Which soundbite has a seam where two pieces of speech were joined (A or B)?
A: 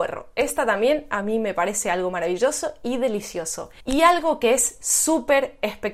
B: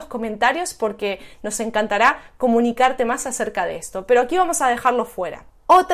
A